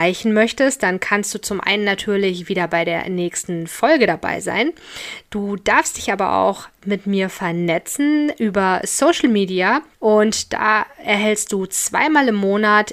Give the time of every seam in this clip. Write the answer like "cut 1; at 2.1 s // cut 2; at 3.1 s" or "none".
cut 1; at 9.9 s